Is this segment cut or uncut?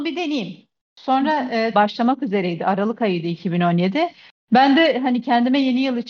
cut